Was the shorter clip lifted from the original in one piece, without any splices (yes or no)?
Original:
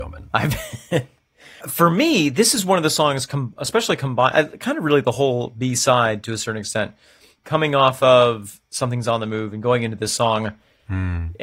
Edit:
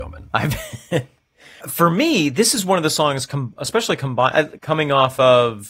no